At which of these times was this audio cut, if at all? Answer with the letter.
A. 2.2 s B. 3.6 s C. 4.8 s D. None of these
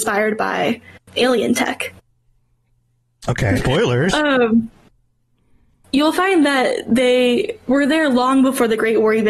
B